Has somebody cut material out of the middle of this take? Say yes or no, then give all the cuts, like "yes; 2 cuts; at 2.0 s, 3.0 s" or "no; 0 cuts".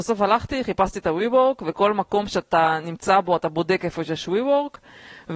no; 0 cuts